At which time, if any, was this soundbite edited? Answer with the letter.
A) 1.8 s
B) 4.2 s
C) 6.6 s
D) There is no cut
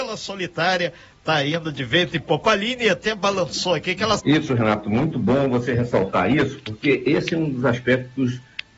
B